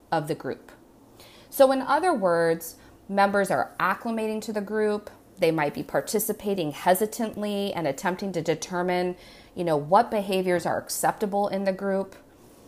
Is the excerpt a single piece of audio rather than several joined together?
yes; 0 cuts

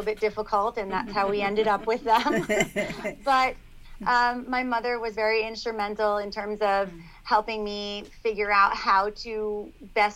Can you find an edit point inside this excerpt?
no; 0 cuts

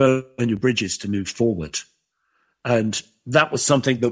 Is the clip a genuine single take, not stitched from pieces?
yes; 0 cuts

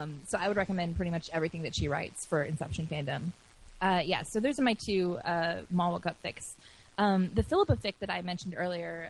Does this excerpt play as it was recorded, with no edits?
yes; 0 cuts

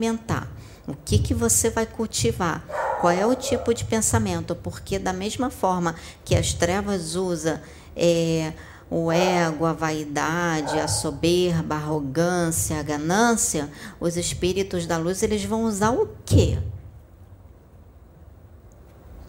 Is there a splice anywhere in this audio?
no; 0 cuts

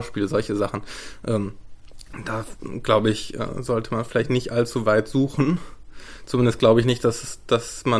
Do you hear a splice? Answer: no; 0 cuts

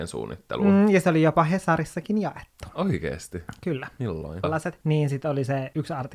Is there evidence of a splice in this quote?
yes; 1 cut; at 4.4 s

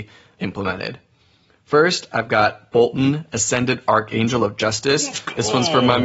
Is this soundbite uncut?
yes; 0 cuts

